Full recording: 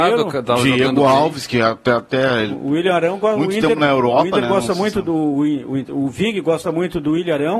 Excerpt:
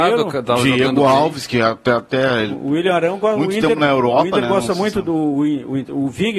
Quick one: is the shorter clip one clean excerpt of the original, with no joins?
yes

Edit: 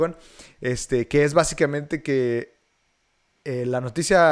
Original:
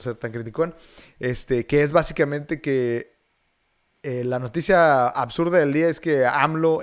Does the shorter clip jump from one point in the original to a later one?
no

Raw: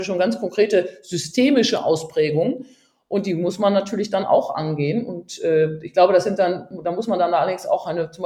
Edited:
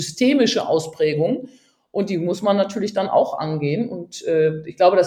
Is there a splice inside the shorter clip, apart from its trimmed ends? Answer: no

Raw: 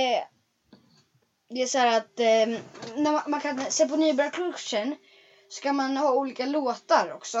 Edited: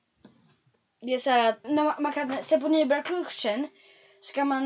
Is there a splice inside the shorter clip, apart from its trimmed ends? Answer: yes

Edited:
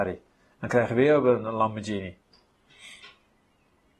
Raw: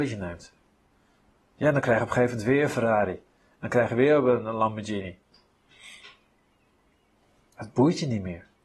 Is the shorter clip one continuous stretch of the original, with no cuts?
yes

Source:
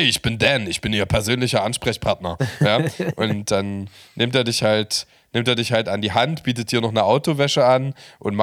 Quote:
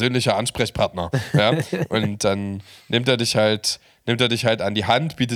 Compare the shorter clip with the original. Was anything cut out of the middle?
no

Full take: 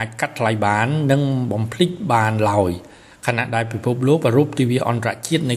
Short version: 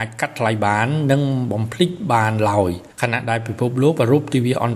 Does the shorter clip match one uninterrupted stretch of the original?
no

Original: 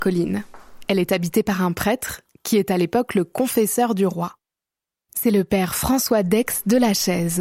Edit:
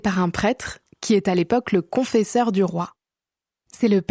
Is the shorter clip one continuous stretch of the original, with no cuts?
yes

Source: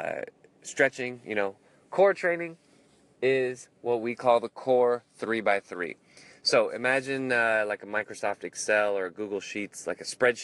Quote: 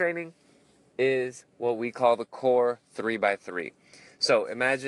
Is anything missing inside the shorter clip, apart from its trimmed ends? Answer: no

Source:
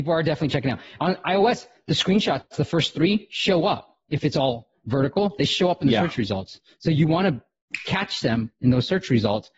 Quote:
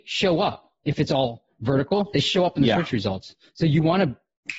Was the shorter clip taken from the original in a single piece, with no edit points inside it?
yes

